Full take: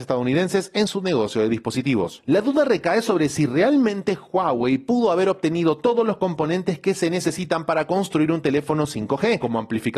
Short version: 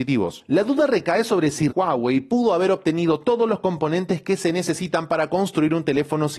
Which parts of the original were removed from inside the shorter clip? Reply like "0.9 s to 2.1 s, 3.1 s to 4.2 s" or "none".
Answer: 3.5 s to 4.3 s